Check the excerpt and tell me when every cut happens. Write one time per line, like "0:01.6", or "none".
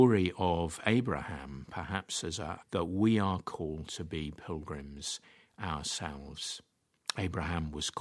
0:02.6